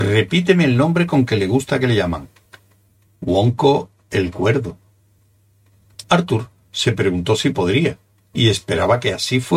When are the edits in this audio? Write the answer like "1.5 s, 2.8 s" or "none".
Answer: 6.0 s